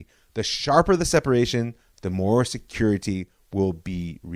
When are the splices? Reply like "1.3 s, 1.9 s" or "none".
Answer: none

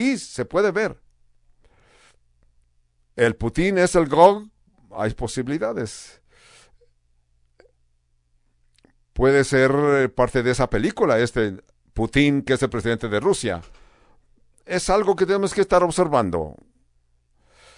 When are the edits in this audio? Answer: none

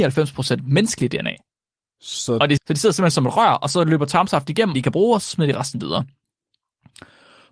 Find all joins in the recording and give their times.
2.6 s, 4.7 s

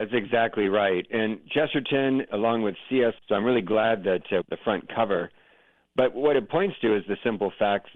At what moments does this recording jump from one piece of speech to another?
3.2 s, 4.4 s

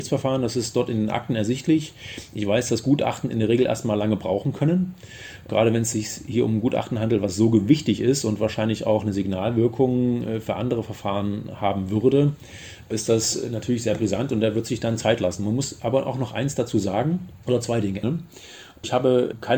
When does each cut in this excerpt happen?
18.0 s

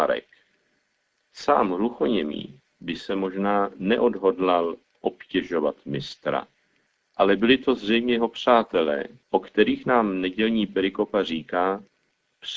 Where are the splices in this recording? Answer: 9.2 s

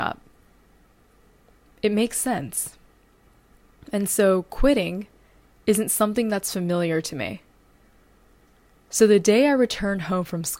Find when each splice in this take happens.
none

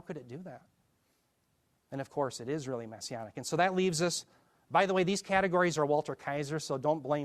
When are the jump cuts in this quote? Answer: none

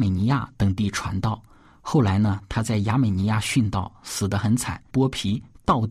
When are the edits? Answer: 4.9 s

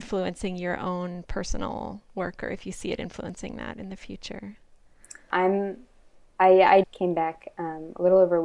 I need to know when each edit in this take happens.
5.3 s, 6.8 s

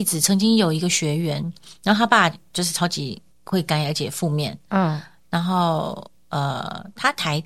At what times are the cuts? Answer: 3.3 s

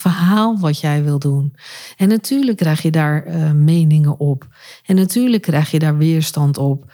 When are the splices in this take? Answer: none

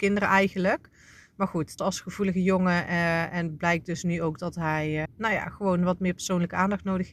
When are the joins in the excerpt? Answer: 1.8 s, 5.1 s

